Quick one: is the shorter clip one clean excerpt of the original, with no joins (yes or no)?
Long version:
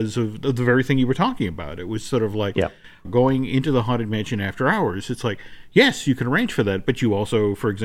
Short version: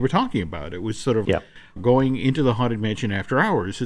no